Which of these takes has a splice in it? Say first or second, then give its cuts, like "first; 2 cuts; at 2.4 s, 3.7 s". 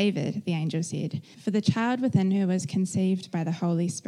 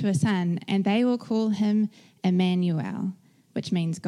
first; 1 cut; at 1.3 s